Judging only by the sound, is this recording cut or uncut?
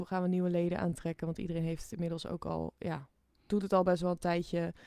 uncut